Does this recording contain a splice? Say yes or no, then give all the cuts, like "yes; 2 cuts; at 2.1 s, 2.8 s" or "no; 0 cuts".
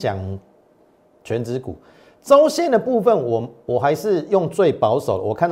no; 0 cuts